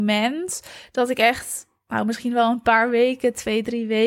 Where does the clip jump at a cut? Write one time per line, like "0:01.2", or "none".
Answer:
none